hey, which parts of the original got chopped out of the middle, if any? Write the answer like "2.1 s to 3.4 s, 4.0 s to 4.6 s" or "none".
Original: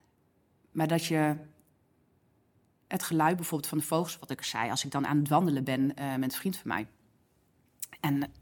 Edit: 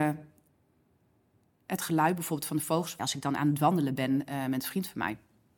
4.2 s to 4.7 s